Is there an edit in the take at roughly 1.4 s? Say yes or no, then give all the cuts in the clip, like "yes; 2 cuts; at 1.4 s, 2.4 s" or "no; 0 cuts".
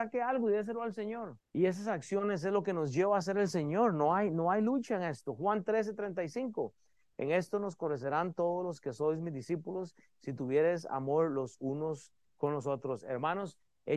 yes; 1 cut; at 1.4 s